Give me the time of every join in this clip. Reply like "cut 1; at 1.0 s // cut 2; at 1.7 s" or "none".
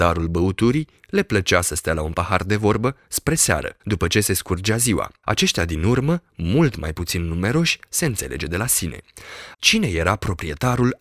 cut 1; at 9.5 s